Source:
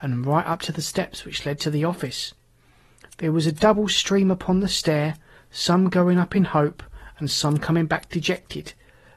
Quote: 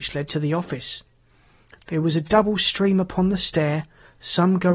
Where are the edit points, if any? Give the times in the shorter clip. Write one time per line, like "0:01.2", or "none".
none